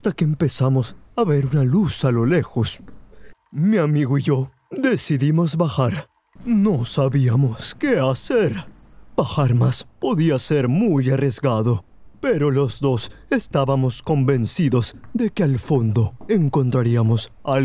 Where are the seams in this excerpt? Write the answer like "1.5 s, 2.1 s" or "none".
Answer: 3.3 s, 6.4 s